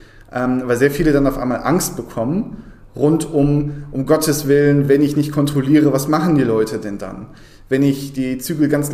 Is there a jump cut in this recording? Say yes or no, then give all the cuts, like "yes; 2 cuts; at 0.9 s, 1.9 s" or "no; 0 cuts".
no; 0 cuts